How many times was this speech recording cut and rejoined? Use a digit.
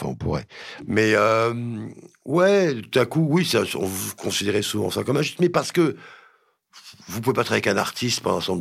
1